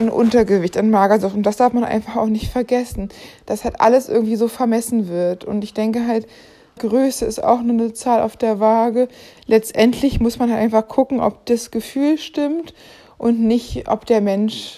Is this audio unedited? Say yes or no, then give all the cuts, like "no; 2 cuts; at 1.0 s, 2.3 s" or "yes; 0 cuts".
no; 2 cuts; at 6.8 s, 9.4 s